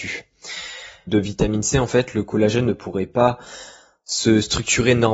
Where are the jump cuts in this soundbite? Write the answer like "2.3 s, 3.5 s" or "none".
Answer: 1.1 s